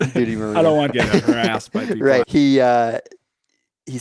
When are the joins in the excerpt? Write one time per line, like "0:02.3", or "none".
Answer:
0:00.9
0:02.2

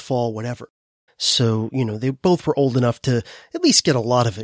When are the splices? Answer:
0:01.1

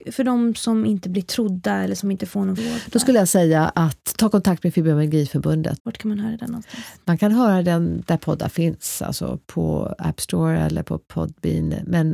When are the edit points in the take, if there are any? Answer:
0:02.6
0:05.8

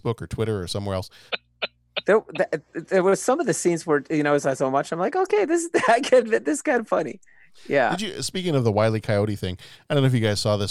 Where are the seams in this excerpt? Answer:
0:01.3

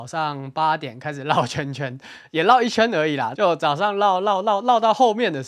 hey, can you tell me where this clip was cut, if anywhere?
0:03.3

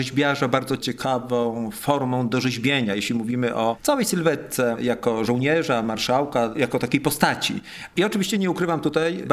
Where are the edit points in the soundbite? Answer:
0:07.9

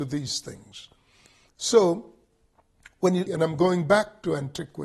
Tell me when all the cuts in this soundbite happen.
0:01.5
0:03.3

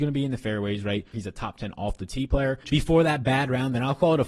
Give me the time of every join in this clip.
0:01.1
0:02.6

